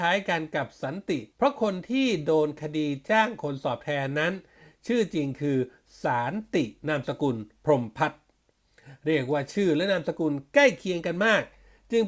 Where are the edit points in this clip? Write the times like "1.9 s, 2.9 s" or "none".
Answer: 1.3 s, 6.8 s